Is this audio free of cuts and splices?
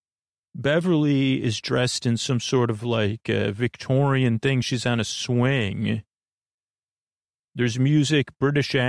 yes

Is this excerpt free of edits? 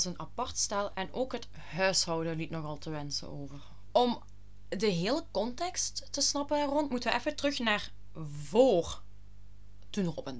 no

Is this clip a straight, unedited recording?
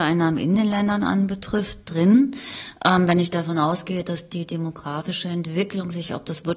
yes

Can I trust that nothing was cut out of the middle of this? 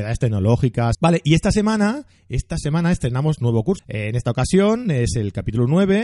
no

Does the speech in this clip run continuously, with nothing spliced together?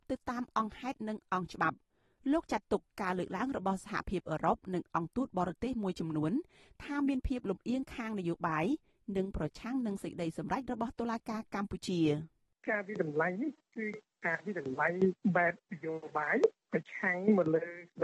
yes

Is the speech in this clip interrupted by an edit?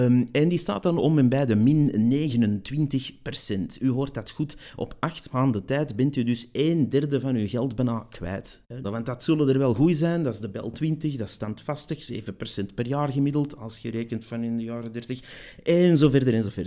yes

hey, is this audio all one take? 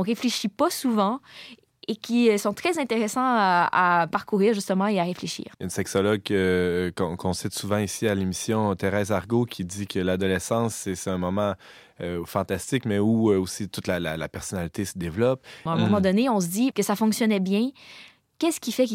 no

